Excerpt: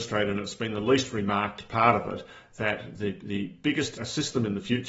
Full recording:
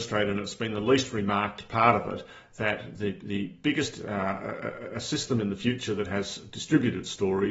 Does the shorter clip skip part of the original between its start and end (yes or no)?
yes